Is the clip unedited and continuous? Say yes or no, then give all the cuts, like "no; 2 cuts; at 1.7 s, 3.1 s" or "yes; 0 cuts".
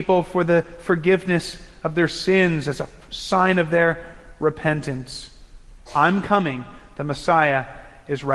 no; 1 cut; at 5.9 s